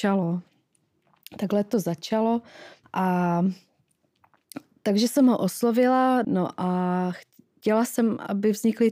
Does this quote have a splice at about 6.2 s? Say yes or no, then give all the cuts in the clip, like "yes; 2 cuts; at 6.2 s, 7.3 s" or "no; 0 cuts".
yes; 2 cuts; at 2.8 s, 6.2 s